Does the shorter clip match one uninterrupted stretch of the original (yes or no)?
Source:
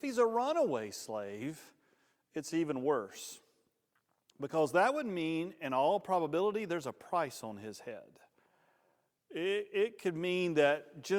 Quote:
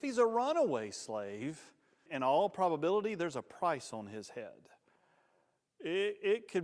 no